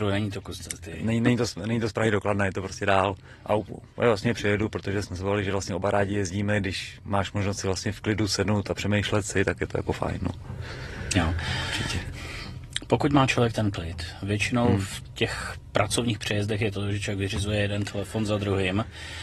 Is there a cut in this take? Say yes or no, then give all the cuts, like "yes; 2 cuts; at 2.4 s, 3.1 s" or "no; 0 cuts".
no; 0 cuts